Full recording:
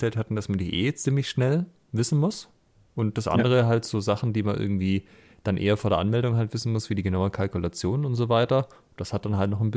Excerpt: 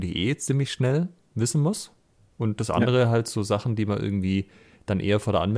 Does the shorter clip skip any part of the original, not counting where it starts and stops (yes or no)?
no